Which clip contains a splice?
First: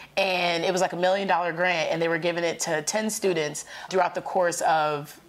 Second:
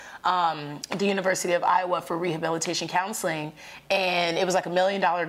first; 1 cut; at 3.9 s

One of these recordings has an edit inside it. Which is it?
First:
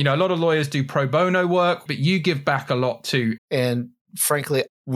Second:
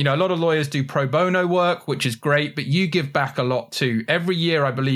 first; 2 cuts; at 1.9 s, 3.4 s

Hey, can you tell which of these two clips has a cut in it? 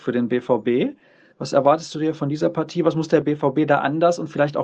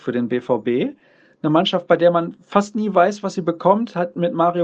first; 1 cut; at 1.3 s

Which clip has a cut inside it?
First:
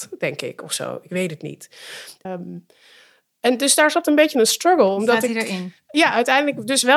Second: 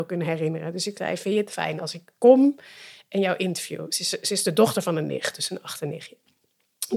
first; 2 cuts; at 2.2 s, 5.9 s

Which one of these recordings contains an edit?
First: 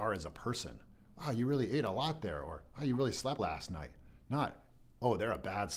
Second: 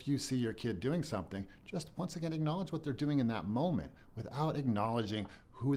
first; 1 cut; at 3.4 s

